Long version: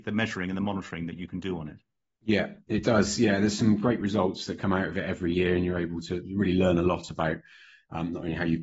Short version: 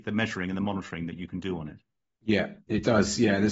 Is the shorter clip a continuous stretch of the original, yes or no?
yes